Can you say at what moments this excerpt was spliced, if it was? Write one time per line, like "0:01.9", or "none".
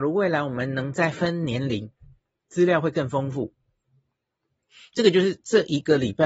none

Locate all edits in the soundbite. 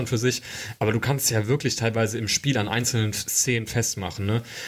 none

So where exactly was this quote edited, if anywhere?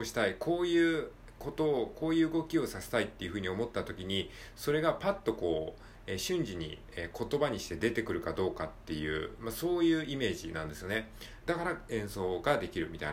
0:11.4

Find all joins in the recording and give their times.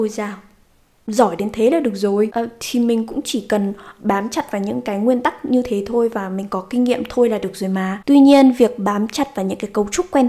0:04.0

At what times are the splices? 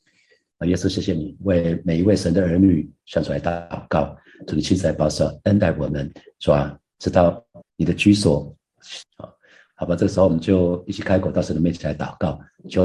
0:07.6
0:09.0

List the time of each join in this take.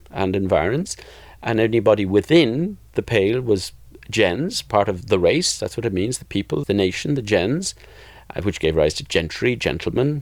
0:06.6

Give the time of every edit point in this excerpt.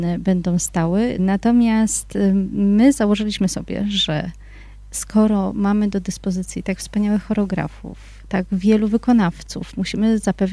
0:01.2

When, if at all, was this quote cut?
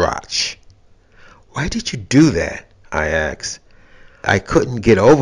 0:04.2

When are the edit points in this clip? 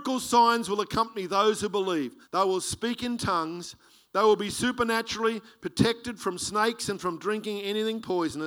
0:02.2

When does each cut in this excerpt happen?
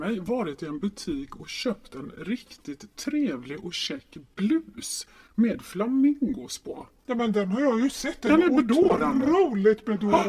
none

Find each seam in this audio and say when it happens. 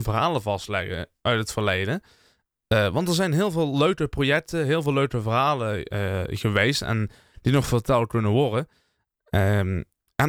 none

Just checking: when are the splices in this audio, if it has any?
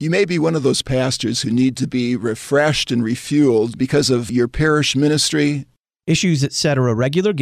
none

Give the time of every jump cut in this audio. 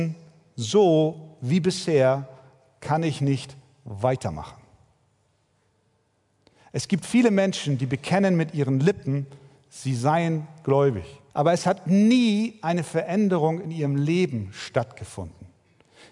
0:11.3

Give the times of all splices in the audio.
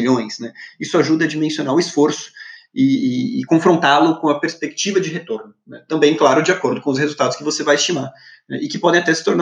none

